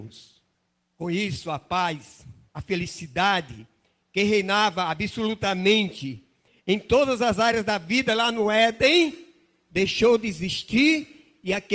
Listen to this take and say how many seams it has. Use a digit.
0